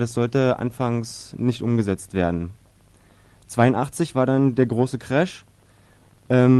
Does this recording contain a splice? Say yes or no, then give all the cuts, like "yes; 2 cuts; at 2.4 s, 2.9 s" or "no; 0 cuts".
no; 0 cuts